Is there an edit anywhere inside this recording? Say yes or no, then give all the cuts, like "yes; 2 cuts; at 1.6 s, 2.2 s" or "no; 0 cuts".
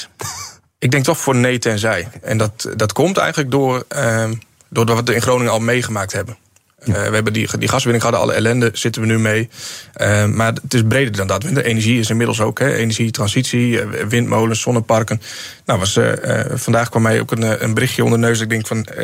no; 0 cuts